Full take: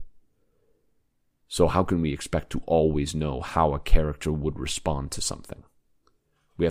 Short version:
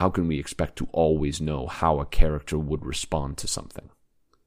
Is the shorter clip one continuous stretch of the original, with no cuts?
yes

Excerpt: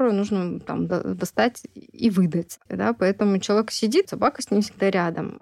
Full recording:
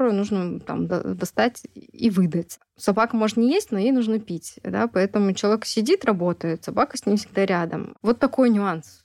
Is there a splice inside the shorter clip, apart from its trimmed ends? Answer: yes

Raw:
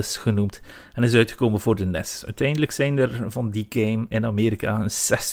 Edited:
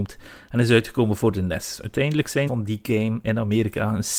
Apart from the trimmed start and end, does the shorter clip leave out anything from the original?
yes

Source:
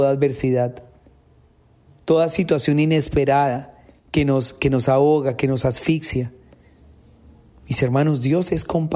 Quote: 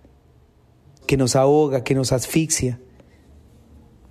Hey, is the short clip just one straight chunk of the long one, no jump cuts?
no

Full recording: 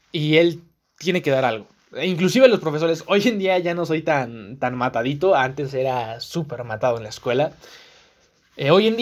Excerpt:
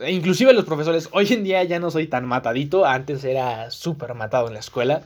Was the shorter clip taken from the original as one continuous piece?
no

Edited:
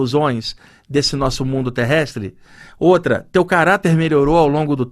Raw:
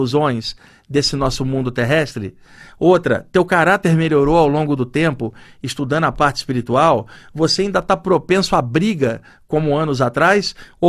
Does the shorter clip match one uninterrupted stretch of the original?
yes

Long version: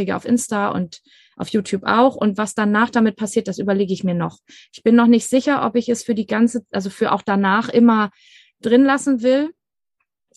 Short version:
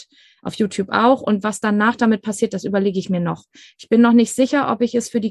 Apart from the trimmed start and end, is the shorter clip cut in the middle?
no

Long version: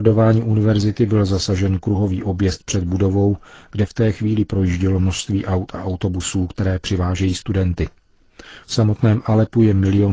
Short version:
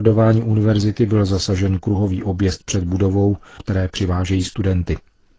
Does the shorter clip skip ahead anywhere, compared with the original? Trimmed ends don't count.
yes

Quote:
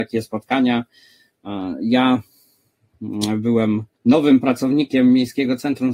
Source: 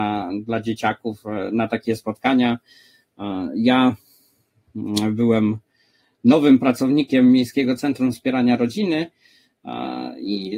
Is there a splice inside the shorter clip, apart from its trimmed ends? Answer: yes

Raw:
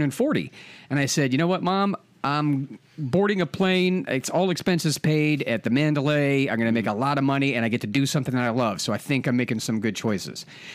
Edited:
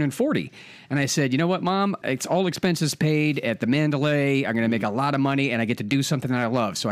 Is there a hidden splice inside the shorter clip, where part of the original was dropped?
yes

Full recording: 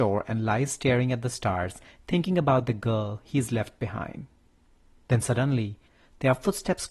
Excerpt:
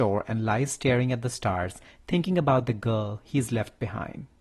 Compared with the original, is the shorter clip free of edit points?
yes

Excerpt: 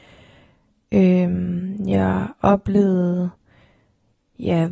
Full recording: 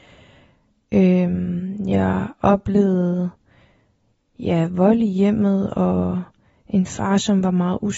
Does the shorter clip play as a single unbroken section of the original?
yes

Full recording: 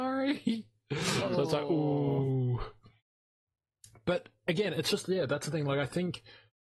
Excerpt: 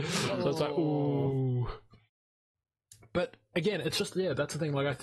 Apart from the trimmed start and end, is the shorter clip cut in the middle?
no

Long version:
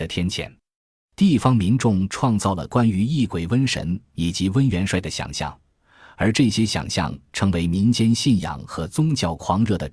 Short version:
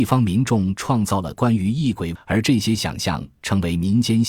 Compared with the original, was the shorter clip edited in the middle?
yes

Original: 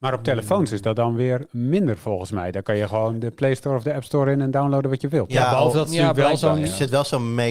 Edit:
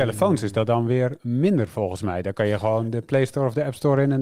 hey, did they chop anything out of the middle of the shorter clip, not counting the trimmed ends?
no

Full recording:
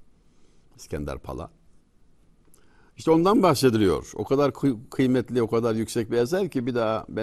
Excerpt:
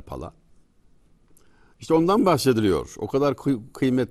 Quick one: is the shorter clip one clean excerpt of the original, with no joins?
yes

